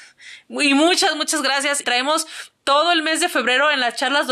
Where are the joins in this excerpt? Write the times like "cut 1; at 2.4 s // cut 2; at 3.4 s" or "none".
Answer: cut 1; at 1.8 s